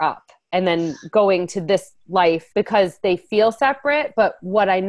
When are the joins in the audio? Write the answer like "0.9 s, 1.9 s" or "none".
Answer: 2.5 s